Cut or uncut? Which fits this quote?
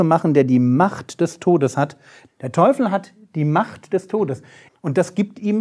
cut